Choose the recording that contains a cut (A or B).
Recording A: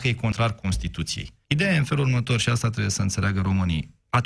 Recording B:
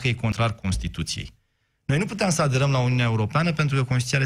A